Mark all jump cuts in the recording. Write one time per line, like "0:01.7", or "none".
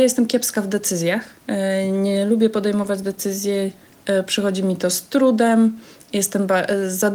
none